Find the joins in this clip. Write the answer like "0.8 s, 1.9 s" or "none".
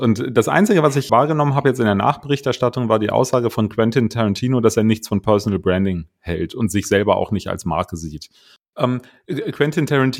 1.1 s, 8.7 s